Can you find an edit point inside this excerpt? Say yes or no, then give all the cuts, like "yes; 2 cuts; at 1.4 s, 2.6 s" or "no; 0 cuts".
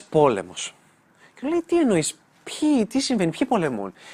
no; 0 cuts